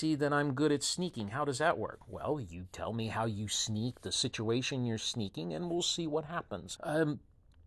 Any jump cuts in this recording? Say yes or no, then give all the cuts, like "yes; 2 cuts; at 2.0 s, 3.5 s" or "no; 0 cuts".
yes; 1 cut; at 6.8 s